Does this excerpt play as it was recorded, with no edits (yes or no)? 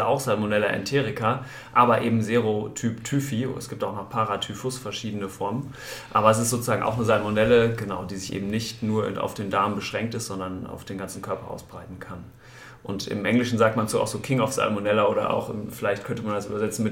yes